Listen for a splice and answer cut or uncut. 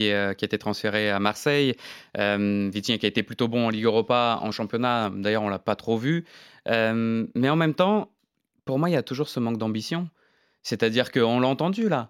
uncut